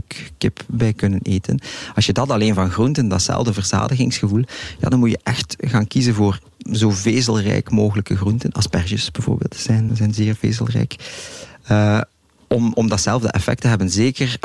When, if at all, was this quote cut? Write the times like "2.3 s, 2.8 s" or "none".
9.9 s